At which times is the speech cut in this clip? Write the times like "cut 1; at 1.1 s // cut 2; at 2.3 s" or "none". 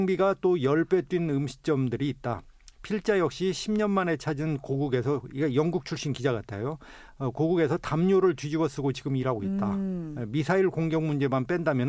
none